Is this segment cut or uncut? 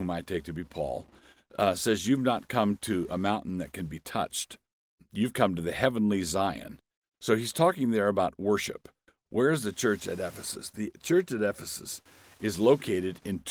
cut